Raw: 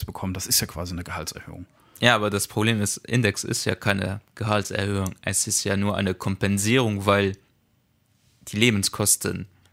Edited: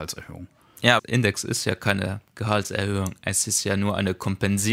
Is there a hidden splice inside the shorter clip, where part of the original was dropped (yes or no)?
yes